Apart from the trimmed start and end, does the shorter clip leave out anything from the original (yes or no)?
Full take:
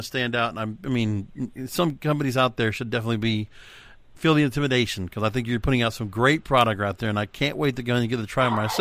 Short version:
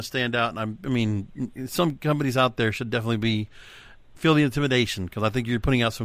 no